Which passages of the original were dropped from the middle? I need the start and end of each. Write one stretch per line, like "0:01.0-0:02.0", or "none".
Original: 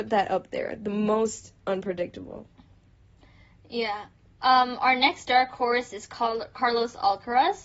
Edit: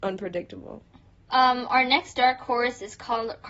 0:02.8-0:04.3

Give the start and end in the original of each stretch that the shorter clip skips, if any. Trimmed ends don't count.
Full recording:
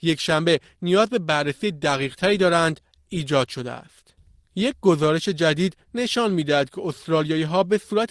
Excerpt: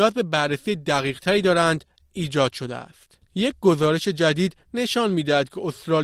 0:04.2-0:04.4

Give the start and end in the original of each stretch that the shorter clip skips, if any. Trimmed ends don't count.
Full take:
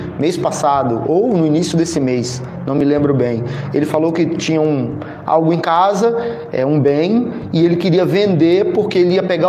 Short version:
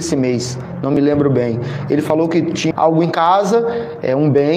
0:04.5-0:05.2

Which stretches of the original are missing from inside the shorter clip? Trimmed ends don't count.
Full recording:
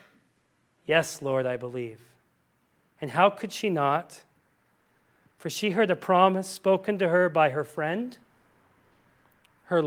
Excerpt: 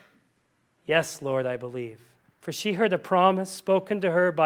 0:02.2-0:05.2

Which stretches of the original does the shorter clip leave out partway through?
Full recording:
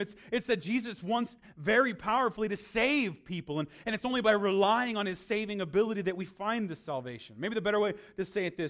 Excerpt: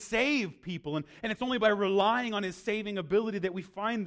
none

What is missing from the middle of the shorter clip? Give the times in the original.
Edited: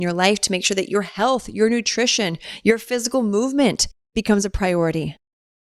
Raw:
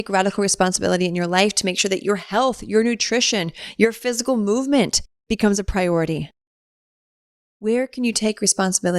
none

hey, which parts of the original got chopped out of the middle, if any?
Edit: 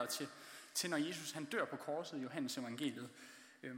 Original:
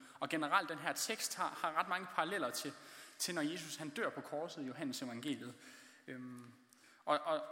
none

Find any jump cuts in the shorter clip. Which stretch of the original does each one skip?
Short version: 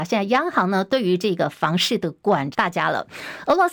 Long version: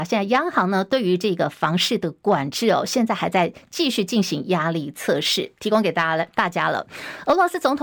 0:02.5-0:06.3

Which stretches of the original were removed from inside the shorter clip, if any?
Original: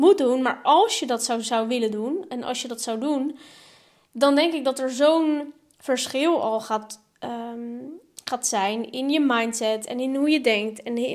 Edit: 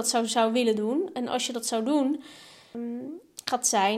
0:03.9-0:07.5

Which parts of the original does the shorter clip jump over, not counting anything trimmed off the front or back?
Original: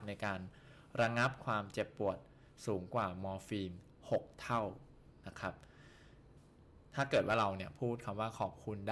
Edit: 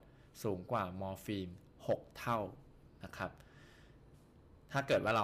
none

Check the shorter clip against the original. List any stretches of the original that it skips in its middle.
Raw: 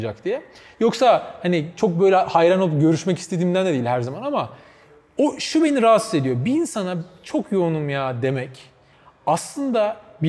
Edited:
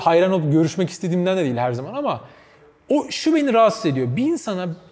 none

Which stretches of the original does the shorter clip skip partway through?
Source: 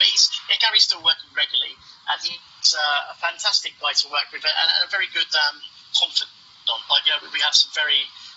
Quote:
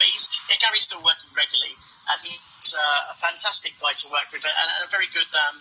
none

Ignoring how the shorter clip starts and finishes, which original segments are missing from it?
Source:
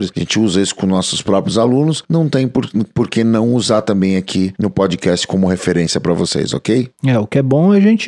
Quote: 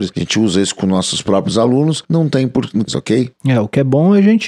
0:02.9-0:06.5

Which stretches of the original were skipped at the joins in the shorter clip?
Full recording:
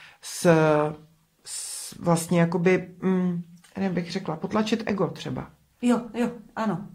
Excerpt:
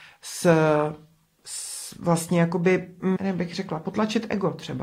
0:03.2-0:03.7

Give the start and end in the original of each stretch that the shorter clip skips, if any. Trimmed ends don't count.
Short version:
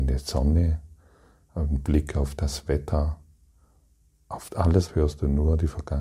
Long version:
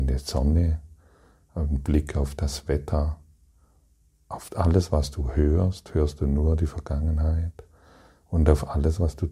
0:04.9-0:05.9

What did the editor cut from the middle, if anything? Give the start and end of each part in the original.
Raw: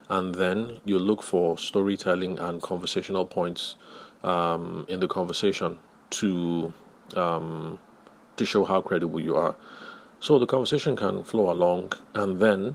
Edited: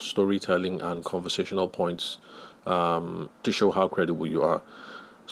0:04.9-0:08.2

